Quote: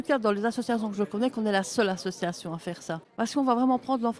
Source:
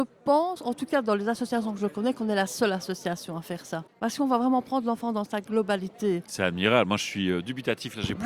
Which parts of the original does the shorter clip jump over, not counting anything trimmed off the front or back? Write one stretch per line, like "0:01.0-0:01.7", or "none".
none